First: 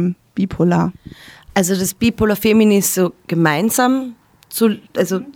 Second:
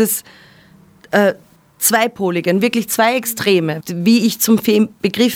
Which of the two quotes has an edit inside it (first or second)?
second